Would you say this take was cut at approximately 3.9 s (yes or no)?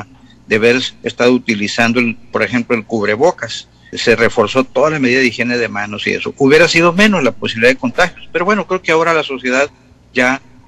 yes